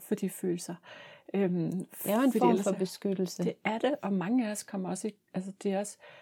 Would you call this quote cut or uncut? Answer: uncut